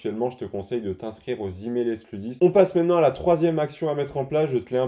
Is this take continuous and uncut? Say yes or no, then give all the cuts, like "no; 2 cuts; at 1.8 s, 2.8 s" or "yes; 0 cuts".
no; 1 cut; at 2.4 s